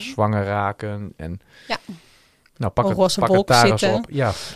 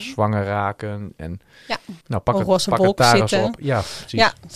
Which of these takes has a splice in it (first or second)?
second